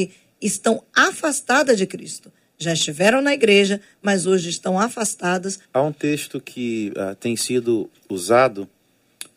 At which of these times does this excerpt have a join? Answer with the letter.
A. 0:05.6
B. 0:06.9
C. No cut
A